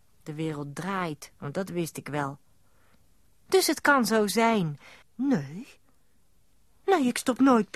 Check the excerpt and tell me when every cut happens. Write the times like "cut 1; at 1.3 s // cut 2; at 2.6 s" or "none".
cut 1; at 1.4 s // cut 2; at 3.5 s // cut 3; at 5.0 s